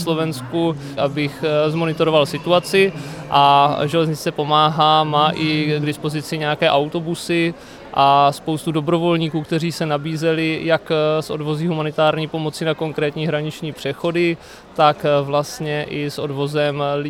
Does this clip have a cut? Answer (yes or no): yes